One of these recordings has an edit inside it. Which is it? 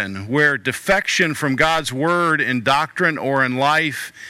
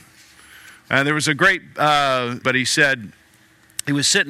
second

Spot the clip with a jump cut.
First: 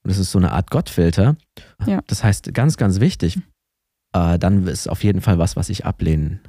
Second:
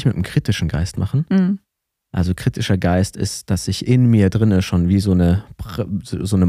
first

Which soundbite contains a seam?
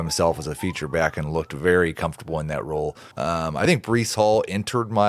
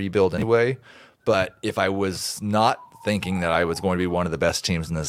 first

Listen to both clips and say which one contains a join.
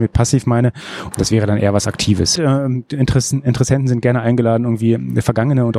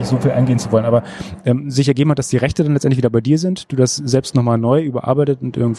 first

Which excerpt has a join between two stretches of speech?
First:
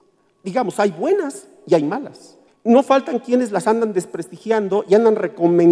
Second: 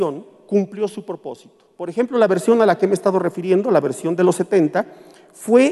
first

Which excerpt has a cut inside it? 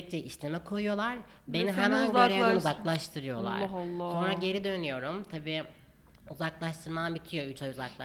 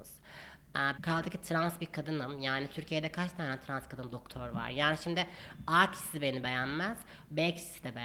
second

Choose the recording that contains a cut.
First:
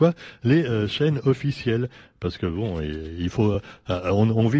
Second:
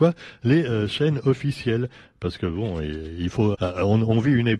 second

